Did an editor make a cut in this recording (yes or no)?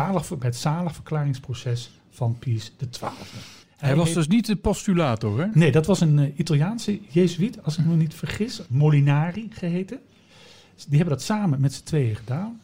no